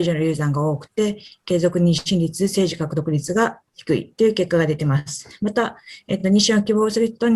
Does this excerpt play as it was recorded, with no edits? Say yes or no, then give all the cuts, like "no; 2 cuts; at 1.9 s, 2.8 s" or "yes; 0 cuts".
yes; 0 cuts